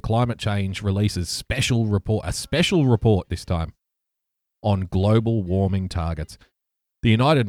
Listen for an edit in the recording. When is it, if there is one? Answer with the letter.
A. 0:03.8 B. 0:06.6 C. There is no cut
C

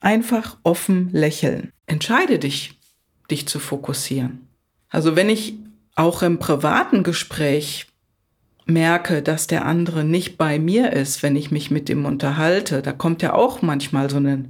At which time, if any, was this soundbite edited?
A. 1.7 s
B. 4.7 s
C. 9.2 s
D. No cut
A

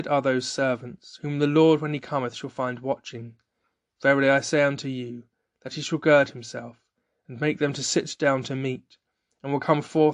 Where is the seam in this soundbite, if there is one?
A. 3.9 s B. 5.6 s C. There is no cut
C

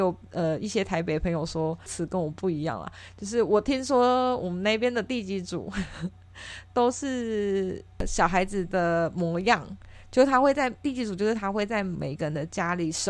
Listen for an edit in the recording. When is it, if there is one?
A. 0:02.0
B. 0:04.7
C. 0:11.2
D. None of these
D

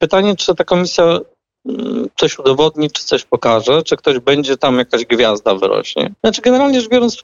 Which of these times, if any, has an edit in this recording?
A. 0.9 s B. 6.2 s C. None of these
B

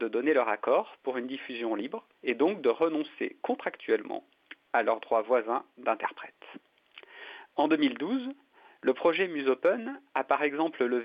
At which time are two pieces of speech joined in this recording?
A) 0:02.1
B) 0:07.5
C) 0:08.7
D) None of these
A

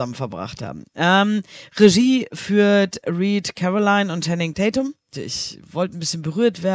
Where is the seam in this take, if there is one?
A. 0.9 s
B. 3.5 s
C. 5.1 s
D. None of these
C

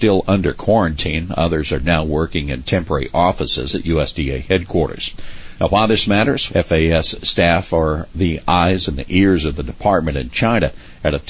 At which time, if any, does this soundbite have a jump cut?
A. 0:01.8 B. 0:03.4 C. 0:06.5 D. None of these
C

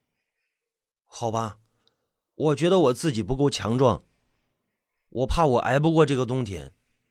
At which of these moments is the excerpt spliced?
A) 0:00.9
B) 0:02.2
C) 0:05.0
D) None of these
D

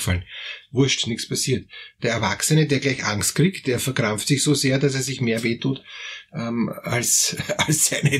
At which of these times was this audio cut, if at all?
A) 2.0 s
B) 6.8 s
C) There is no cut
A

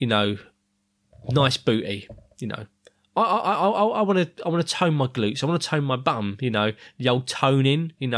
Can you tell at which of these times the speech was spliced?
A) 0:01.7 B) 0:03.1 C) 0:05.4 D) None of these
D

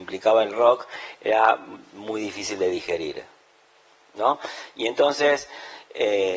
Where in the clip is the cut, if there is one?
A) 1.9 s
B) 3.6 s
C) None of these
C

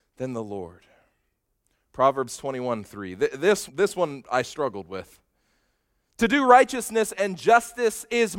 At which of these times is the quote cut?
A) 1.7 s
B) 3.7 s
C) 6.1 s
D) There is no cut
B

